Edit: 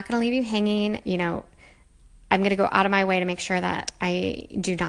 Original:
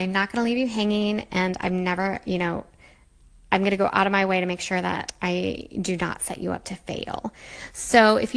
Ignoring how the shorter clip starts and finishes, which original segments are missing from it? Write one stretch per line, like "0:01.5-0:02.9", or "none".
0:01.3-0:02.2